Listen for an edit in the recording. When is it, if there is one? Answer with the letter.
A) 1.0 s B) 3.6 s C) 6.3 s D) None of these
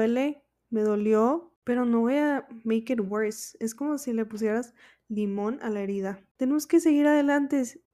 C